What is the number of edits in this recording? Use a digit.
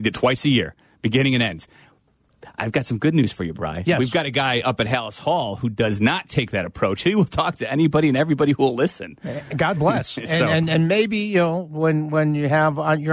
0